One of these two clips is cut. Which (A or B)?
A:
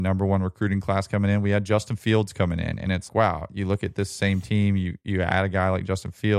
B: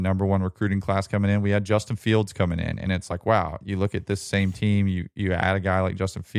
A